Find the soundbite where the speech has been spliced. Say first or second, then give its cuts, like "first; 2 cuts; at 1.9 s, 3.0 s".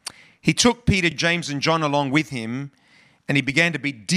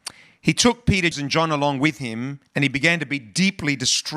second; 2 cuts; at 1.1 s, 2.5 s